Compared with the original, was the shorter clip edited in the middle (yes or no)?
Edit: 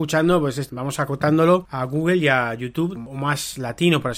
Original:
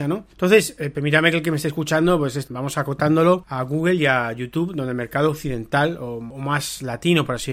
yes